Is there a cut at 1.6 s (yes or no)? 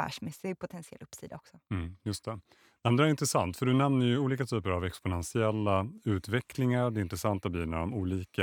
no